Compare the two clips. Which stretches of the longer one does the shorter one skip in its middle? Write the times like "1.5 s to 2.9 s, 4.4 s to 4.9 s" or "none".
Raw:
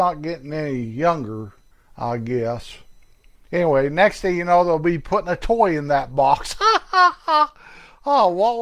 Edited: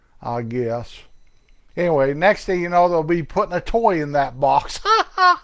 none